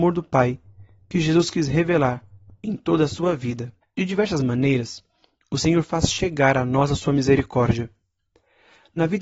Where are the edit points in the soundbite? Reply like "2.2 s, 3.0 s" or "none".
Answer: 3.8 s